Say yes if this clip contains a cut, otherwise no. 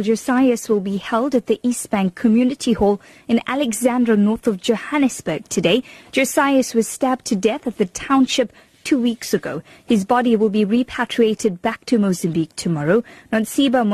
no